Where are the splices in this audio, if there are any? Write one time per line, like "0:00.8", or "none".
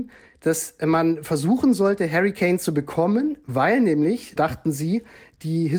0:04.4